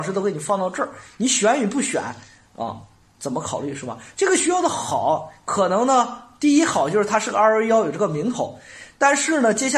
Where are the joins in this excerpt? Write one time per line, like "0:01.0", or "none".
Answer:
none